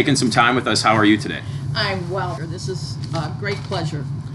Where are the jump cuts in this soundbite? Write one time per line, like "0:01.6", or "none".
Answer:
0:02.4

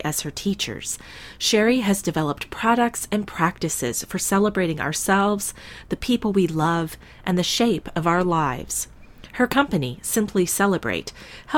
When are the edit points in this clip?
none

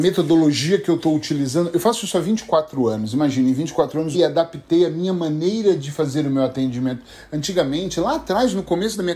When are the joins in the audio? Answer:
0:04.1

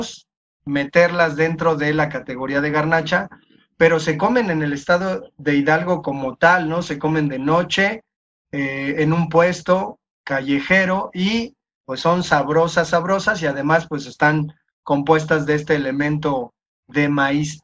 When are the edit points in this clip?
none

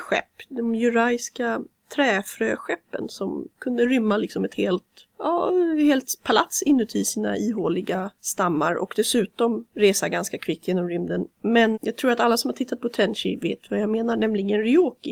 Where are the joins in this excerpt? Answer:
0:11.7

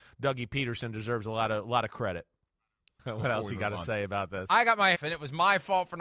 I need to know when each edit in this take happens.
0:03.0
0:04.9

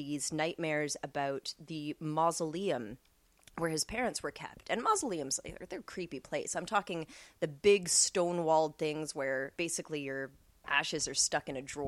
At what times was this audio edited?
none

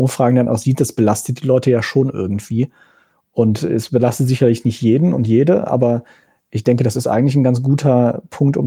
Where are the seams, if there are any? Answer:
none

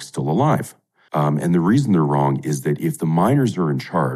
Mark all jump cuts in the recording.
0:01.1

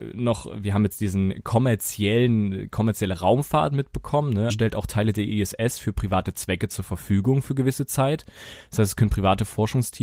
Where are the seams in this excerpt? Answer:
0:04.5

